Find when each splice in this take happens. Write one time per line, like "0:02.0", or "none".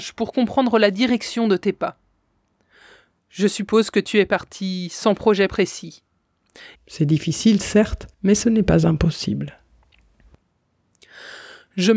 0:06.7
0:08.1